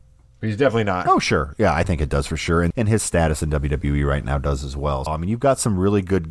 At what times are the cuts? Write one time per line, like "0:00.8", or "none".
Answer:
0:01.1
0:02.7
0:05.1